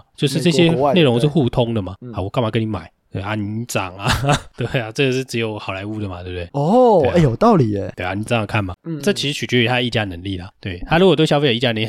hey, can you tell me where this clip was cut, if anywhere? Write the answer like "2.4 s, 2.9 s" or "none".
8.8 s